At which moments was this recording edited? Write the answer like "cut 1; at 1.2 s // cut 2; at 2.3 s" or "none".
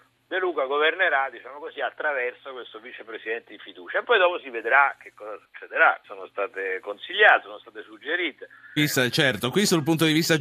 cut 1; at 6.0 s // cut 2; at 8.8 s